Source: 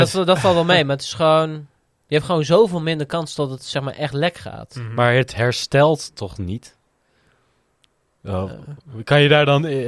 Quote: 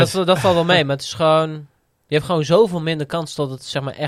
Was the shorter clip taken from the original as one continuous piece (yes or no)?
yes